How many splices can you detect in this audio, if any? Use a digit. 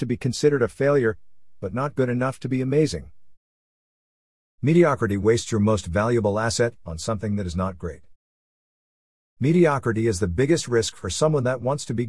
1